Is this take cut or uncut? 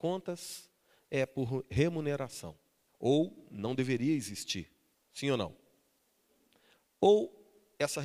cut